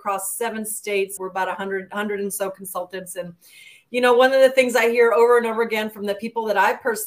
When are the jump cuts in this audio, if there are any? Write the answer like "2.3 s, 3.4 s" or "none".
1.2 s